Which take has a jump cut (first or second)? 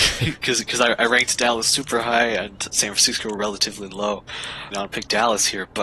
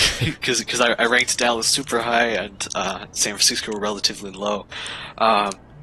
first